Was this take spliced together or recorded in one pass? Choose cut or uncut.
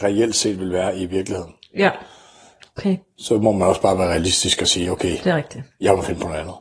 uncut